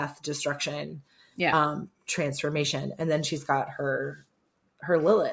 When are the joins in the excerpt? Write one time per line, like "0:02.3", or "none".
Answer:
none

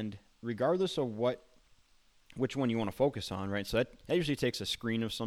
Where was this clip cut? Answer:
none

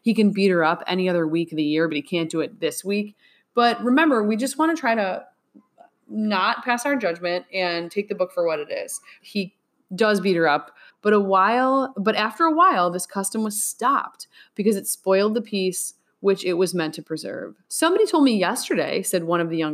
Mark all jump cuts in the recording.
0:09.2
0:10.9
0:17.6

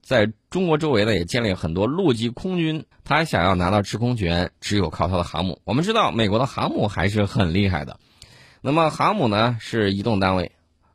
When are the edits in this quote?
0:02.9

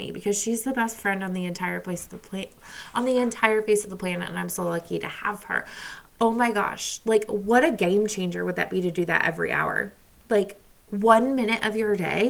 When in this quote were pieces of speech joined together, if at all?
none

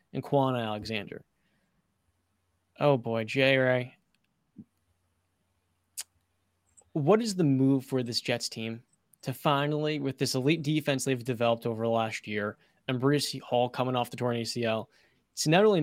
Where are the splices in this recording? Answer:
none

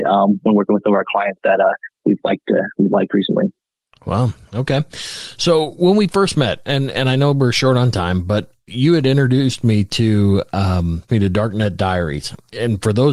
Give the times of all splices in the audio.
none

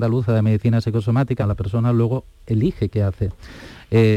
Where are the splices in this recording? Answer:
0:01.4

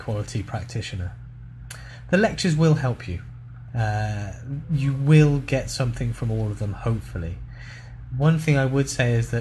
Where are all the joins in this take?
0:03.7

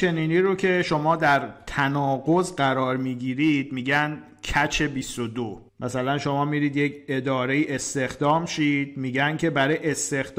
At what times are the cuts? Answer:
0:05.7

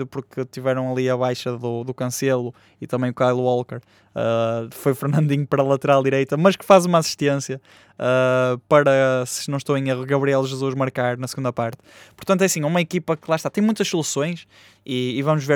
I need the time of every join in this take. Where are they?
none

